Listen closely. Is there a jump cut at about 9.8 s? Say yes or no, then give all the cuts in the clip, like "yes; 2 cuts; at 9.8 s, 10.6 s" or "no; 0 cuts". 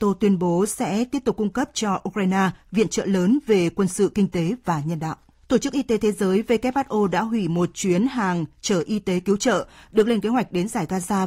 no; 1 cut; at 5.4 s